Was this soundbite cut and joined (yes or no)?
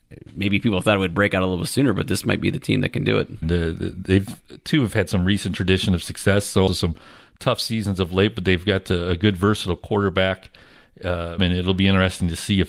yes